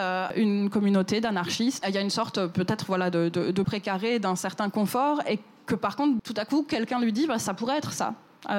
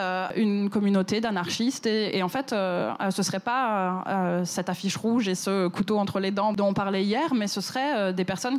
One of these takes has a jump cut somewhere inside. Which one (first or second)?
first